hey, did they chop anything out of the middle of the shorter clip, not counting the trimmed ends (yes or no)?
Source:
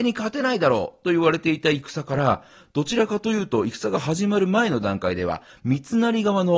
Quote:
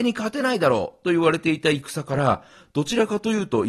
no